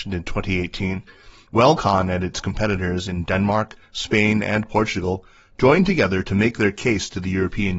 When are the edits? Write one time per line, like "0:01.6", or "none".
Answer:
none